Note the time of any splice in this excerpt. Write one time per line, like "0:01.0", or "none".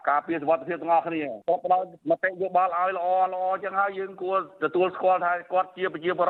none

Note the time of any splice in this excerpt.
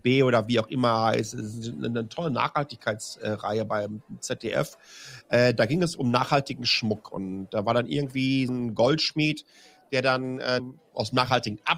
0:08.5
0:10.6

